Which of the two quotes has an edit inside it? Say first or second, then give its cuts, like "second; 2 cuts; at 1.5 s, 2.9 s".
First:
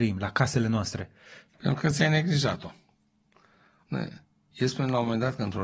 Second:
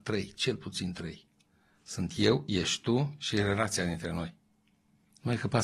first; 2 cuts; at 1.5 s, 3.9 s